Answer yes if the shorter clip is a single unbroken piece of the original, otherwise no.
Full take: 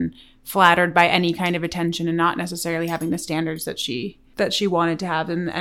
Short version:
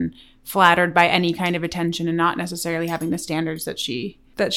yes